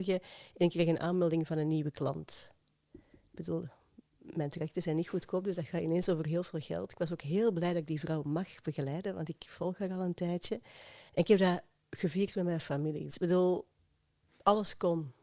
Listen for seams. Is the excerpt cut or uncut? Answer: cut